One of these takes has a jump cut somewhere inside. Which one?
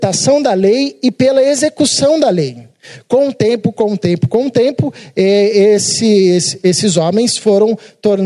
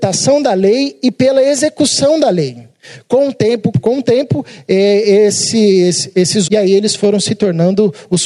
second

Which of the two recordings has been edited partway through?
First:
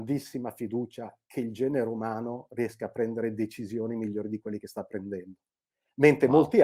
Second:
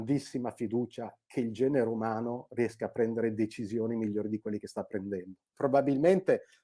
second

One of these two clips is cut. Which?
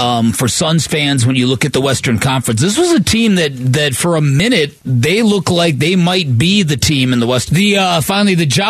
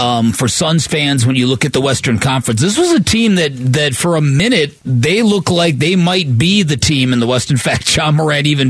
first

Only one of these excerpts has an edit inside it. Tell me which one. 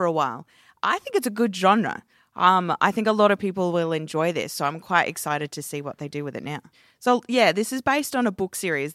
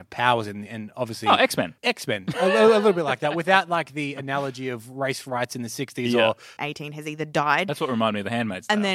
second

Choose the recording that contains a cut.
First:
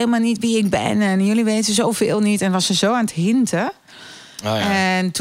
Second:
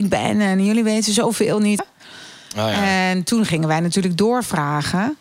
second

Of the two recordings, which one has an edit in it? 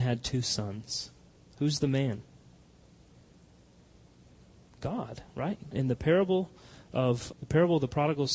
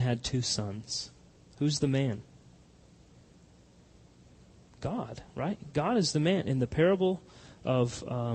first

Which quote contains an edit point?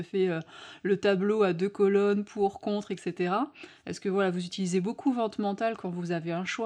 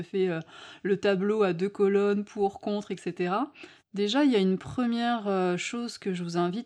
second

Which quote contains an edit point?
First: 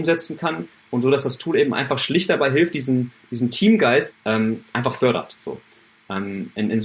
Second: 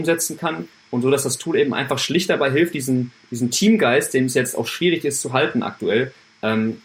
first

